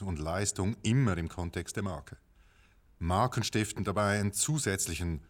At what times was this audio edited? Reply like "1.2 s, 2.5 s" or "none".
2.9 s